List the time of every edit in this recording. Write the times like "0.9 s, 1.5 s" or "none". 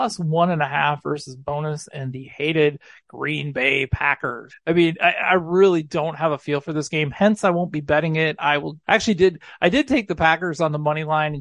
4.5 s, 8.8 s